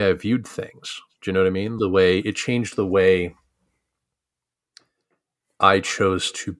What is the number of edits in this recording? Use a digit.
1